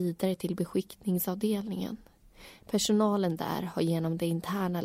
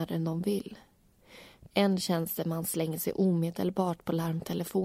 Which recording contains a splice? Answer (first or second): second